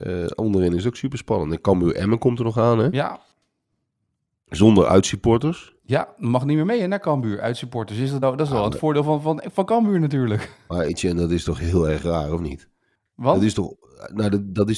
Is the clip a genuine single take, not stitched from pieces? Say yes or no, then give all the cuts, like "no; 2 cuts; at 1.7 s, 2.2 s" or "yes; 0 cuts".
yes; 0 cuts